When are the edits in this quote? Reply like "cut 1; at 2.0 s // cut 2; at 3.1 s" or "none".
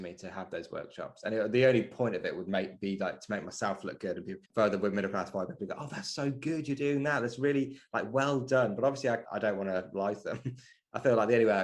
cut 1; at 4.4 s // cut 2; at 9.2 s